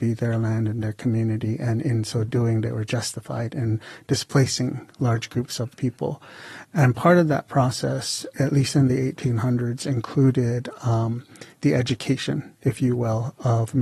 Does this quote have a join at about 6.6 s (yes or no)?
no